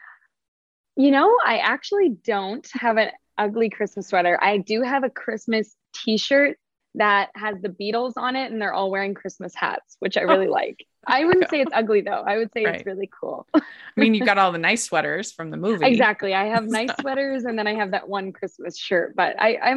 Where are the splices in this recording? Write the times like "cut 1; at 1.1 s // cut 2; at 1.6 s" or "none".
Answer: none